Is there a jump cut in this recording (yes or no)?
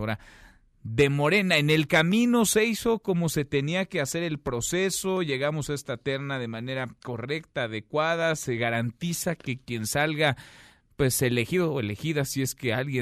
no